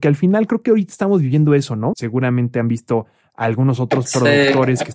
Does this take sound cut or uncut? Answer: cut